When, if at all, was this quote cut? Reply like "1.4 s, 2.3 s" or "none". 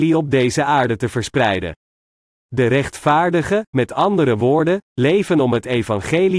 none